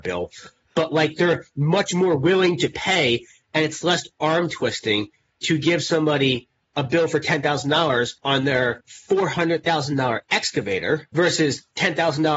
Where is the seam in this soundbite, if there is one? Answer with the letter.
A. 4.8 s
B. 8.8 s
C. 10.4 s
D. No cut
B